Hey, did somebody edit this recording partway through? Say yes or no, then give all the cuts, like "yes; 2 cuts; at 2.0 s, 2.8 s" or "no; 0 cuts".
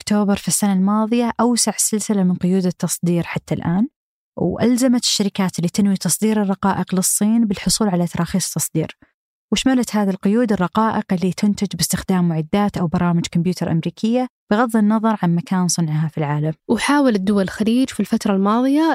yes; 2 cuts; at 14.4 s, 16.6 s